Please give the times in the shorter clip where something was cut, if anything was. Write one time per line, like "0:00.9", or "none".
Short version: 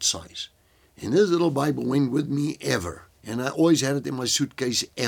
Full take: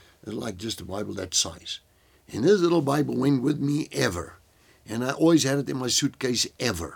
0:03.2